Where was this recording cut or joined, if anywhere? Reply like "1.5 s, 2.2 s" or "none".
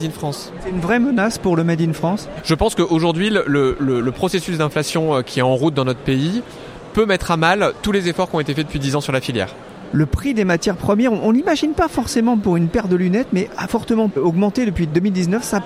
9.9 s